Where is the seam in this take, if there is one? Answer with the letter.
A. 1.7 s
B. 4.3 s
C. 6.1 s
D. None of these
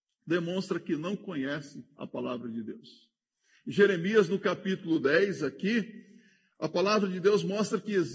D